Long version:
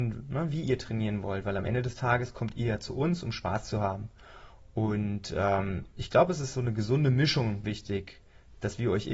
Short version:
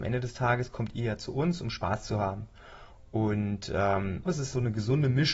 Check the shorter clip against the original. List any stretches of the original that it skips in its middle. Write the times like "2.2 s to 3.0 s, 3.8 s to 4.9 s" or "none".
5.9 s to 6.3 s